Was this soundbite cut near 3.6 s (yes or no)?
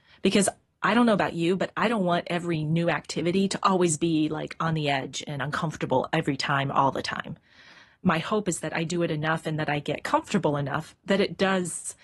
no